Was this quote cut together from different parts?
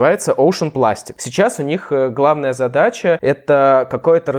yes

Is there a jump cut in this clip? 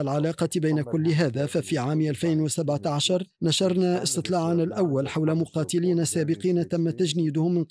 yes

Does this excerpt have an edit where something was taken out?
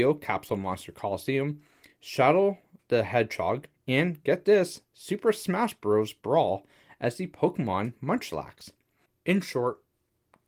no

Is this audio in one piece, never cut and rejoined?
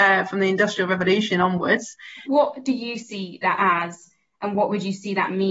no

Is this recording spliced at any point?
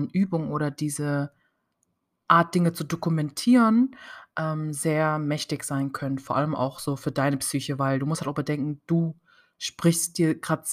no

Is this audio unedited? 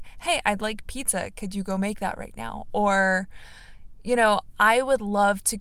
yes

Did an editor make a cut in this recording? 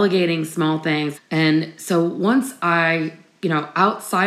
yes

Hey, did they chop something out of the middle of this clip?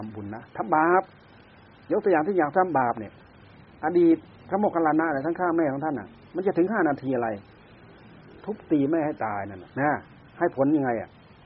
yes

